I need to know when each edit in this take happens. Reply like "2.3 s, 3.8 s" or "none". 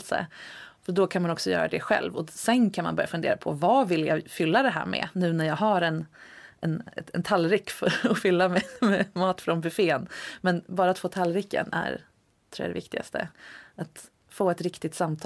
none